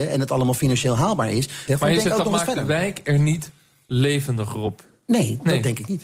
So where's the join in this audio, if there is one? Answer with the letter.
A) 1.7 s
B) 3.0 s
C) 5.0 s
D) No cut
A